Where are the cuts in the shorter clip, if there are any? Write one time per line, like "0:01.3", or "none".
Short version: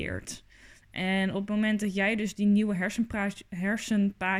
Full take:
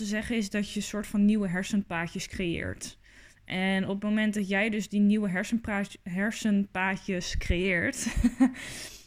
none